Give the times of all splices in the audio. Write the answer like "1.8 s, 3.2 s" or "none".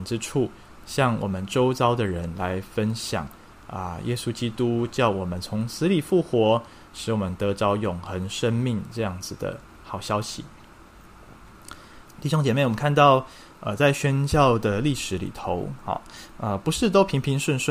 12.1 s

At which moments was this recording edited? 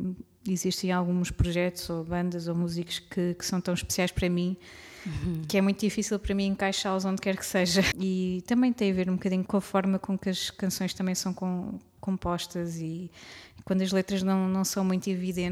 7.9 s, 9.5 s

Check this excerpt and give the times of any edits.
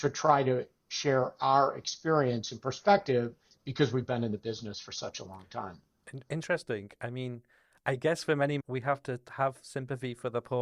8.6 s

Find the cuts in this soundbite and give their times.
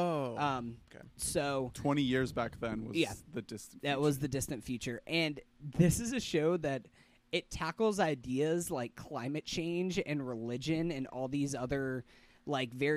none

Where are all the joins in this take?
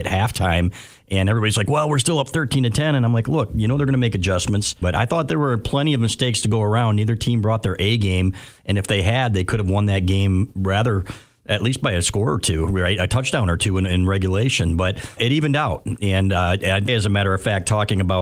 4.8 s, 15.2 s, 16.9 s

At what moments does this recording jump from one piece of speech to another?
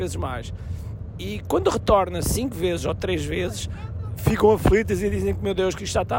none

